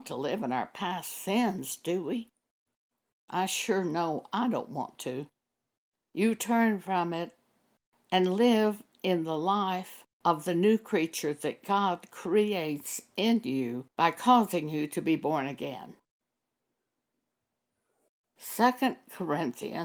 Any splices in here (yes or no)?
yes